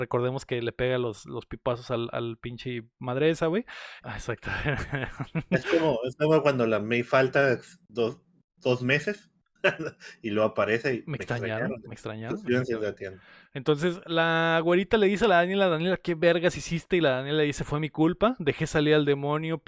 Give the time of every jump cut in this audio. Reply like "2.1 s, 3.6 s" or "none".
4.0 s